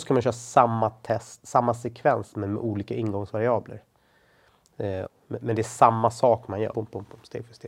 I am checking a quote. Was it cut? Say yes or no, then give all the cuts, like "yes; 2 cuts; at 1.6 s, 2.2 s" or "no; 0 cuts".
yes; 2 cuts; at 5.1 s, 6.7 s